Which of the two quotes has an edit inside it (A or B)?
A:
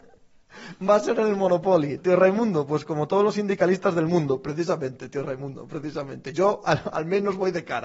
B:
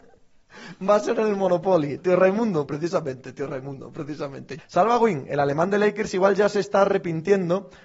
B